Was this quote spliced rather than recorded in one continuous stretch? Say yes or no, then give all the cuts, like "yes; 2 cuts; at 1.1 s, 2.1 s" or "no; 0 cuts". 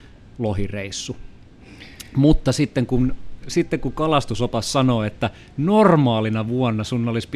no; 0 cuts